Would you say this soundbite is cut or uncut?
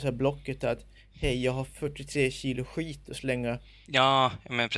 cut